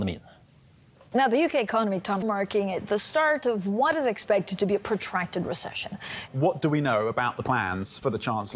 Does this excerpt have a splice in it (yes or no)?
yes